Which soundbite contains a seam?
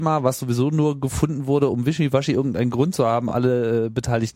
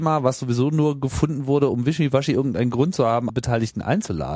second; 1 cut; at 3.3 s

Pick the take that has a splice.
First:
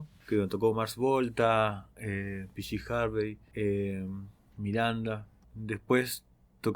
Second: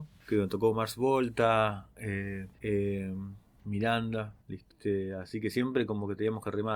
second; 2 cuts; at 2.5 s, 4.4 s

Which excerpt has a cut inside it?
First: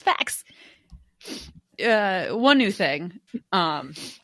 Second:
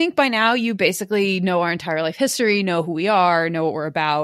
first; 2 cuts; at 1.7 s, 3.3 s

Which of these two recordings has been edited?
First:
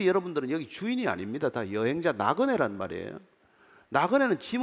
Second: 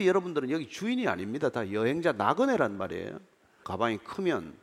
second; 1 cut; at 3.6 s

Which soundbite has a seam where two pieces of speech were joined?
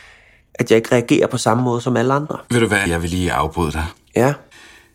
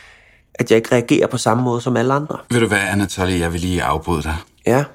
first; 1 cut; at 2.9 s

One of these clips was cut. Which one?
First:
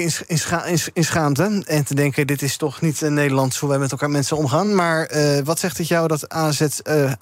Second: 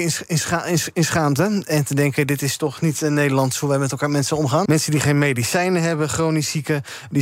second; 1 cut; at 4.7 s

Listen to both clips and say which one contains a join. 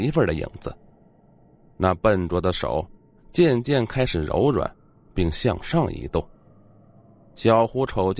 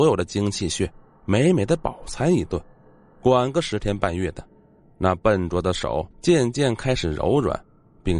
second; 2 cuts; at 4.8 s, 6.1 s

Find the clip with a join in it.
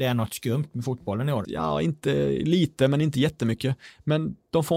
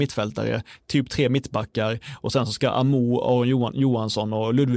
first; 1 cut; at 1.4 s

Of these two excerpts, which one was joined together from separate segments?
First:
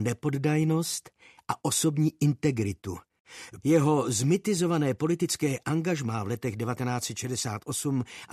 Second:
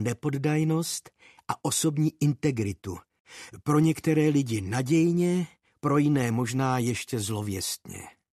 first; 1 cut; at 3.6 s

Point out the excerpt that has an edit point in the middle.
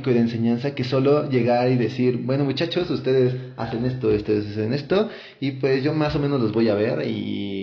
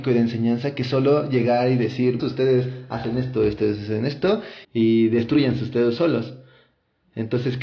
second; 2 cuts; at 2.2 s, 4.6 s

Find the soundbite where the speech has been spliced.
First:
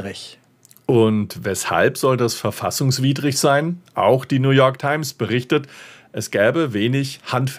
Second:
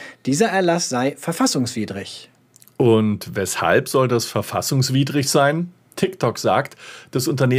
first; 1 cut; at 3.9 s

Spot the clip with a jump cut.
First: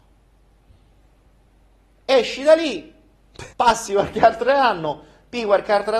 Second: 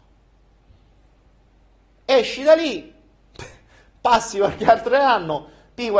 first; 1 cut; at 3.5 s

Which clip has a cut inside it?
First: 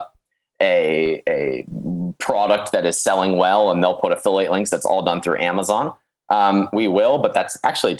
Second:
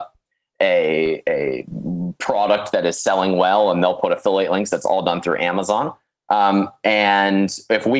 first; 1 cut; at 6.7 s

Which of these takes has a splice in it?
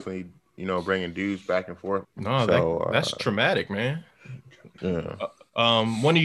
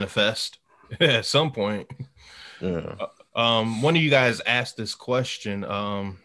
first; 2 cuts; at 2.0 s, 4.8 s

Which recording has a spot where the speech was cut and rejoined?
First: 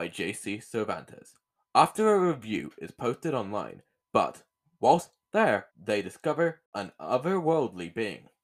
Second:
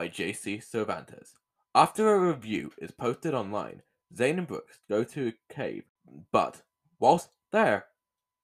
first; 2 cuts; at 4.1 s, 5.7 s

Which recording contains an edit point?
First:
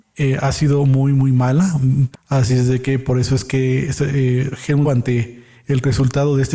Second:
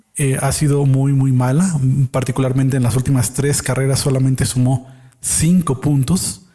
first; 2 cuts; at 2.1 s, 4.8 s

